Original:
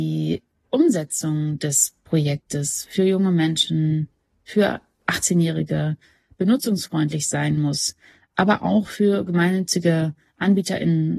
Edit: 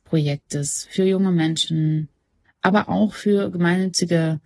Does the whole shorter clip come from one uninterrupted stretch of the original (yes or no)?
no